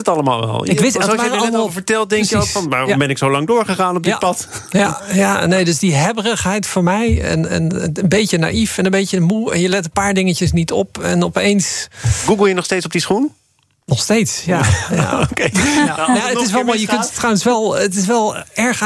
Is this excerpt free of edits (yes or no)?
yes